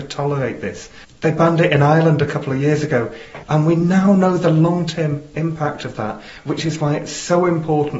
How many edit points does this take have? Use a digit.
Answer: 2